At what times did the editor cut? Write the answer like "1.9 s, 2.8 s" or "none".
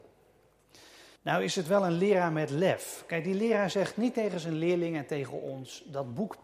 1.2 s